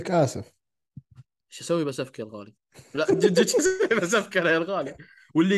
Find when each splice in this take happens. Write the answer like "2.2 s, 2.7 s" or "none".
none